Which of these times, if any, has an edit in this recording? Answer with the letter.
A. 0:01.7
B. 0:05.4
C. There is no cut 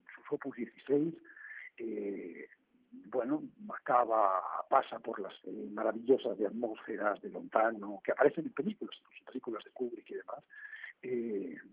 B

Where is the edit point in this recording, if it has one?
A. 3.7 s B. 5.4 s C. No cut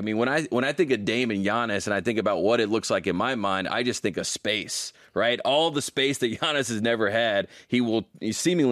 C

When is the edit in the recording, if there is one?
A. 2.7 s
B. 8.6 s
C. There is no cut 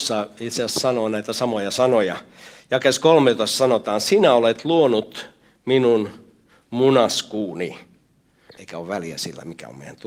B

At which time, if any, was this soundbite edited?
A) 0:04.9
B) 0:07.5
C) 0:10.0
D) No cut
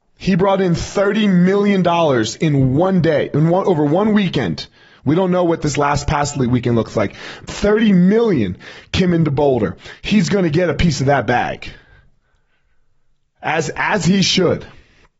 B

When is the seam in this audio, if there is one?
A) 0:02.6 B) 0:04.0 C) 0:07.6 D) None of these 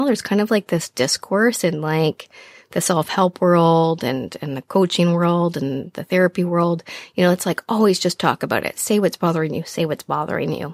D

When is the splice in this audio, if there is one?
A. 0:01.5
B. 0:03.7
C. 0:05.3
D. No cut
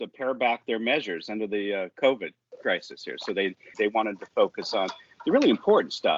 B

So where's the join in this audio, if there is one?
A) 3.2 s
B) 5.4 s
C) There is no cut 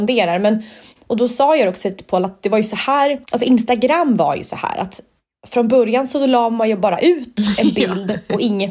A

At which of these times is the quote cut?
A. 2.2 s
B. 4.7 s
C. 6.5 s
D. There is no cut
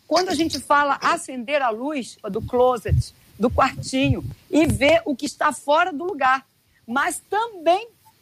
A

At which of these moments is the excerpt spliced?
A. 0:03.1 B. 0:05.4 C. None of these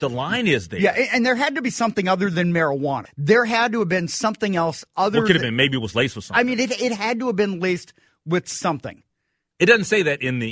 A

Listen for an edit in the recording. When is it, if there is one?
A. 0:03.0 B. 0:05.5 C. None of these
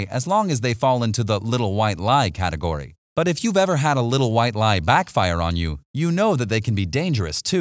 A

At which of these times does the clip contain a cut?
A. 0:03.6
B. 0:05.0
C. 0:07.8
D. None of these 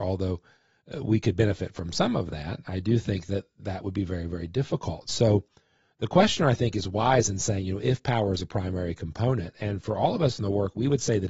A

